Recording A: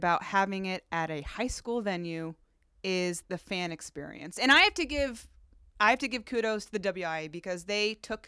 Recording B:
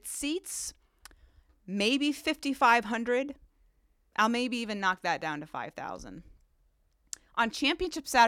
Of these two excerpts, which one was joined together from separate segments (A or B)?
A